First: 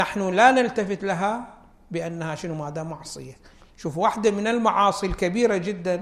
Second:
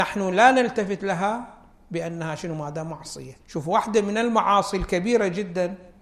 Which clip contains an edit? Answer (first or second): second